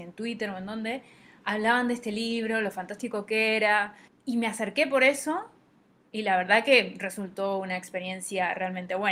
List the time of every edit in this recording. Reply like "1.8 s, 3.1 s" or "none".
none

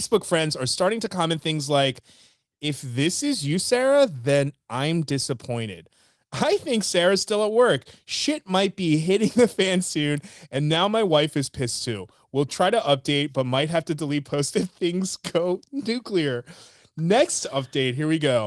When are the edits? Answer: none

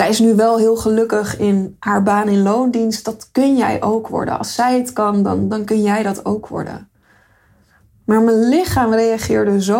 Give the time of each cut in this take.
none

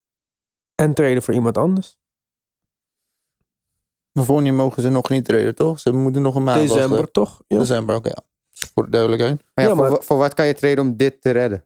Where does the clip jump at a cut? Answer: none

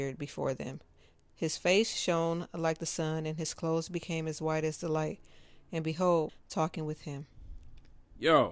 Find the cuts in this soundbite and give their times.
6.3 s

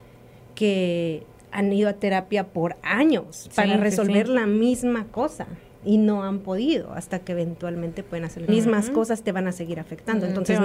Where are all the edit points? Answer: 8.5 s

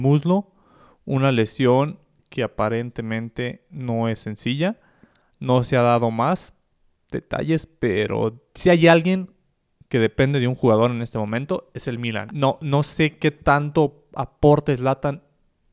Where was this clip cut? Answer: 12.3 s

